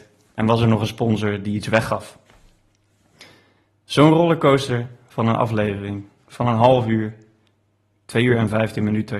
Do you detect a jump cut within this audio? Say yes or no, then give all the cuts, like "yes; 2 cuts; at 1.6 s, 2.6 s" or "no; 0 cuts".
no; 0 cuts